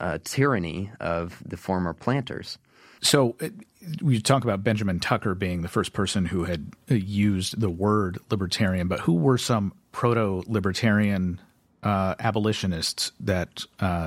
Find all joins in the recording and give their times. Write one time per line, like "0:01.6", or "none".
0:03.0